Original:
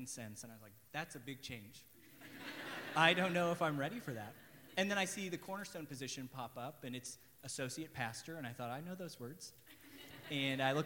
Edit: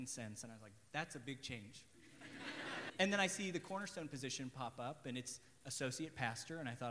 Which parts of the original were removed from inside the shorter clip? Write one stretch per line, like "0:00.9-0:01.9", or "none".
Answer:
0:02.9-0:04.7